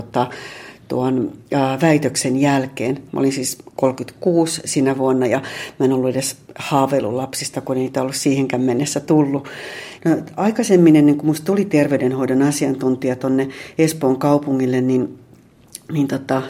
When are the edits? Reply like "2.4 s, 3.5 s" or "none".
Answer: 3.1 s, 10.0 s